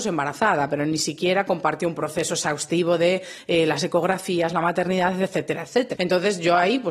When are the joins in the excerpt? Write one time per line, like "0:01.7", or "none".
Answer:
0:06.0